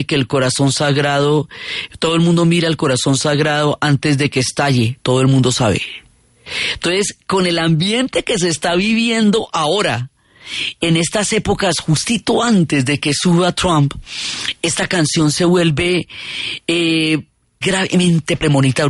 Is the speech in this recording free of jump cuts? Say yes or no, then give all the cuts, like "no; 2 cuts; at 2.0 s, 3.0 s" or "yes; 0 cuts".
no; 1 cut; at 17.6 s